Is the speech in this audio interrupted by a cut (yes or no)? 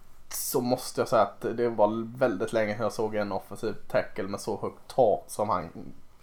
yes